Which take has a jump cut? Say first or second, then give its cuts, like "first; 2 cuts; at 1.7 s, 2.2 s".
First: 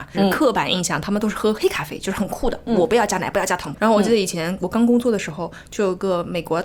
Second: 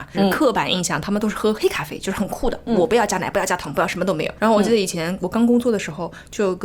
first; 1 cut; at 3.7 s